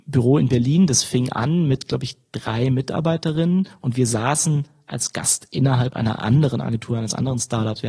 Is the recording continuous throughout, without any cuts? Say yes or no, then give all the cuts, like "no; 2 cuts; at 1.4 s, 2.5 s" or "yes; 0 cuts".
yes; 0 cuts